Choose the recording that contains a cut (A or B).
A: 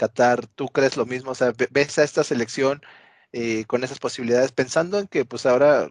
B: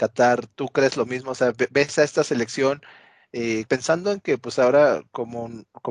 B